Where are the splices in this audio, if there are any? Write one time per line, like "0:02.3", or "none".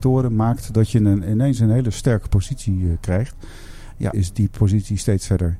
0:04.1